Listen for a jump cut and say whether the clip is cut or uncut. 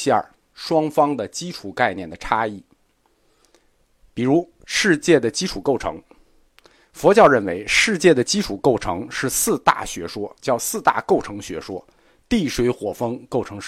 uncut